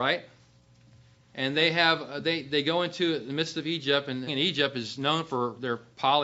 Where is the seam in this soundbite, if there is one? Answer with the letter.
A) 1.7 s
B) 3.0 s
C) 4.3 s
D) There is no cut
C